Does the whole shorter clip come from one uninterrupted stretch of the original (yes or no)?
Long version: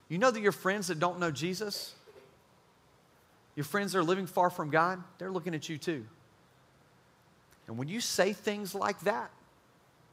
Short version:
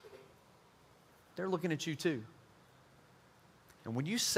no